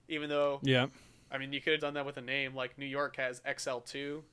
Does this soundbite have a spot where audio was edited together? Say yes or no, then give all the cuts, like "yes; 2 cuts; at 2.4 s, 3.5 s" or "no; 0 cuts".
yes; 1 cut; at 1.8 s